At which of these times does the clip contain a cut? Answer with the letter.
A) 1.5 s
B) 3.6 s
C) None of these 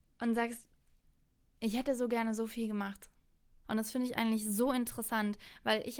B